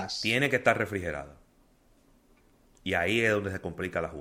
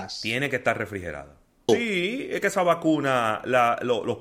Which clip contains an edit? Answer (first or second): second